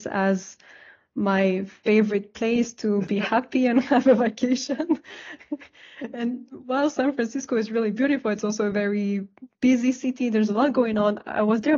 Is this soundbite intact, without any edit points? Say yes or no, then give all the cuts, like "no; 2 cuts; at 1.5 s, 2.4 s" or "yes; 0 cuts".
yes; 0 cuts